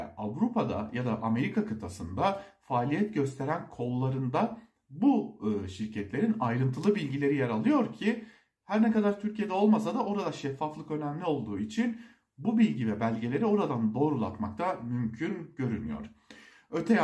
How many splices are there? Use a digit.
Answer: 0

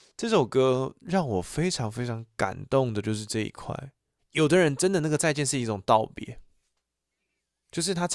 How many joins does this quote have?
1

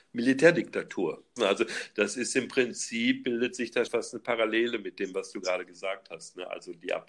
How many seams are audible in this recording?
2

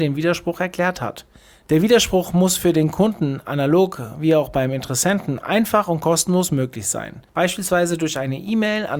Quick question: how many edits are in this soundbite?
1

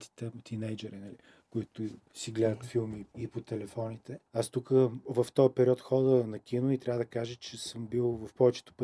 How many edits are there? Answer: 1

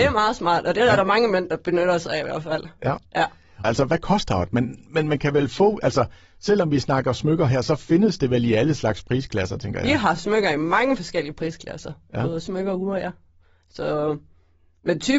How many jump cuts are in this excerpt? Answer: 1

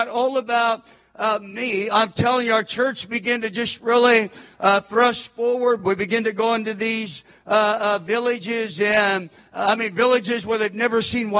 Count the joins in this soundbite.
0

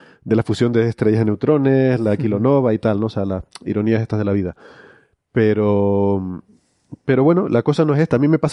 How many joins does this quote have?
0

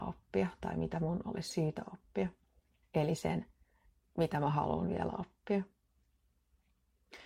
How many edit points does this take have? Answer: 1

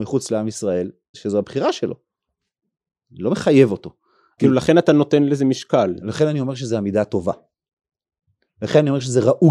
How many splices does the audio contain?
2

